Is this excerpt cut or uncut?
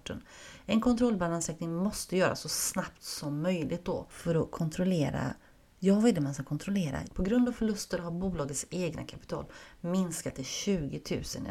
cut